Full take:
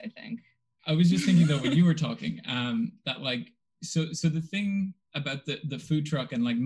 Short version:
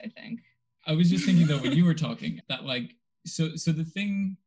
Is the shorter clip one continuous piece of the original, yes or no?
no